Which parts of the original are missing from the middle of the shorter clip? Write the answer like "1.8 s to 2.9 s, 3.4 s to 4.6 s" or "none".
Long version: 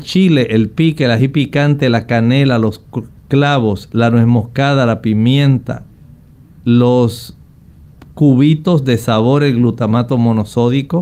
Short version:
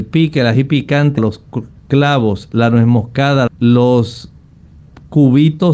1.8 s to 2.6 s, 4.9 s to 6.5 s